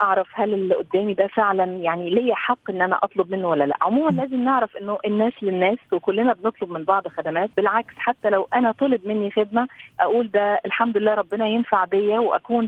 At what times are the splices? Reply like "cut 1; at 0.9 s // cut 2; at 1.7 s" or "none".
cut 1; at 7.5 s